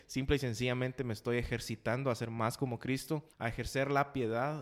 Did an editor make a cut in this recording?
yes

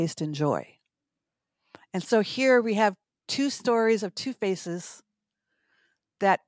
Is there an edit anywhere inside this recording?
no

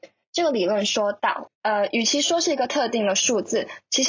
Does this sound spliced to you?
yes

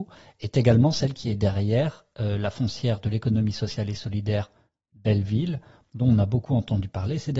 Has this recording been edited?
no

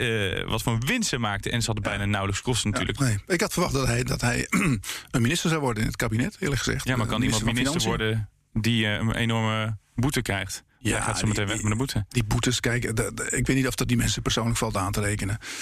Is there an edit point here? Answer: yes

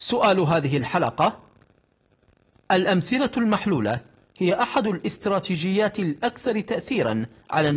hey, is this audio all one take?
yes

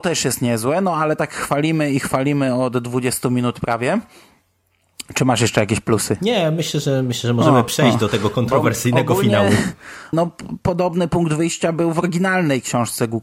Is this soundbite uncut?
no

